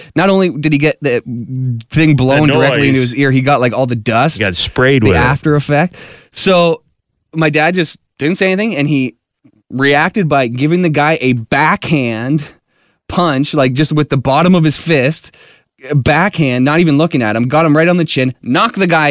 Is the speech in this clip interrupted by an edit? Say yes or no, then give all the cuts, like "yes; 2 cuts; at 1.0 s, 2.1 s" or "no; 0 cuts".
no; 0 cuts